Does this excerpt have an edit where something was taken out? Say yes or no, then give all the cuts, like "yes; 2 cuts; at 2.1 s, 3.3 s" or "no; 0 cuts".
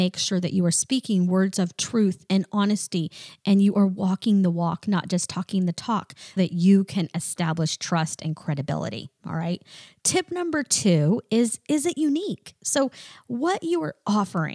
yes; 1 cut; at 6.4 s